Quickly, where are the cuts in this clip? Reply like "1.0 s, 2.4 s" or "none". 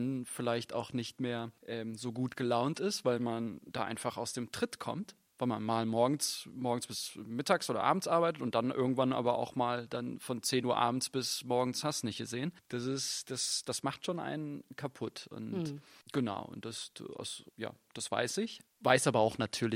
none